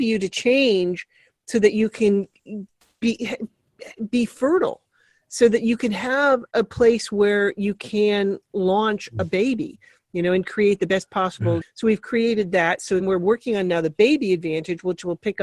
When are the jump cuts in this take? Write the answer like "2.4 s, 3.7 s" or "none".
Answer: 11.6 s, 13.0 s